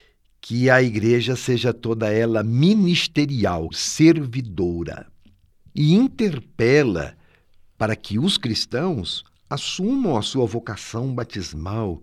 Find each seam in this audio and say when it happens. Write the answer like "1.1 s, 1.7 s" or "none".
3.7 s

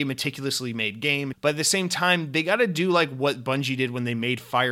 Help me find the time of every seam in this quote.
1.3 s

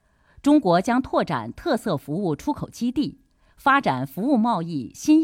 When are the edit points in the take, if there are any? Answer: none

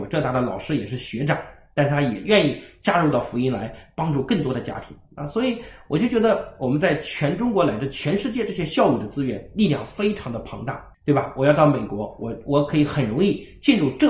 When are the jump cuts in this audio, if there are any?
10.9 s

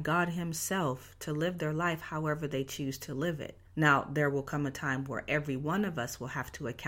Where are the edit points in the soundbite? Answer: 3.6 s

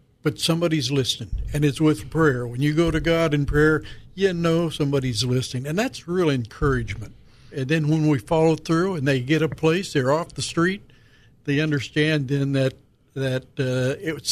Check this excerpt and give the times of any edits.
7.5 s

